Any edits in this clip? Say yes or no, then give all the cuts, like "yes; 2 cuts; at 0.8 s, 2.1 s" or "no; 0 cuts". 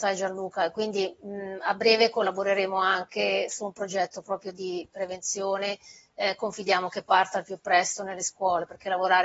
no; 0 cuts